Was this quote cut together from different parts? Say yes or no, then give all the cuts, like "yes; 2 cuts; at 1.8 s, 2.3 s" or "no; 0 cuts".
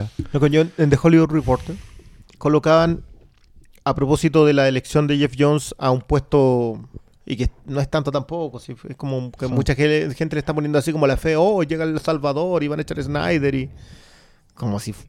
no; 0 cuts